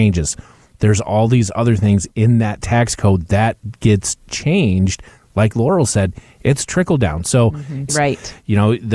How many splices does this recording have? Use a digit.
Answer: 1